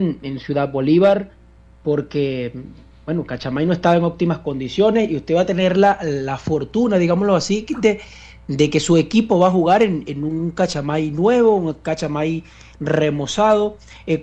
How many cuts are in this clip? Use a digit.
0